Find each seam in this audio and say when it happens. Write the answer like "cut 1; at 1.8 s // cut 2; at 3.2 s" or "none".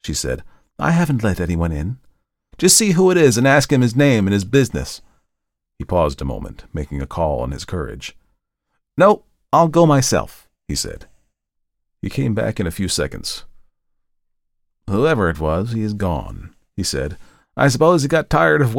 cut 1; at 2.5 s